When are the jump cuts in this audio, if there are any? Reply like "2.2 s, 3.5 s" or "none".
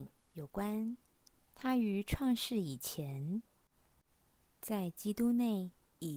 1.4 s